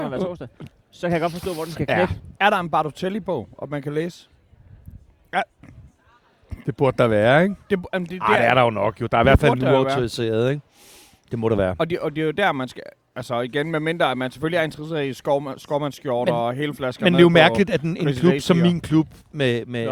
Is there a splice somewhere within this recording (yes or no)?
no